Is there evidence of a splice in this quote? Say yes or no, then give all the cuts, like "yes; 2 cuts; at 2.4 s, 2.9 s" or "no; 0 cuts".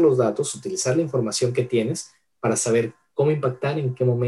no; 0 cuts